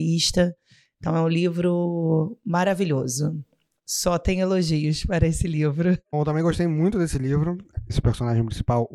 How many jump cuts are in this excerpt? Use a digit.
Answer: 2